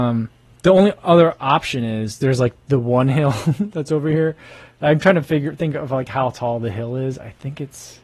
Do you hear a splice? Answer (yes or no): no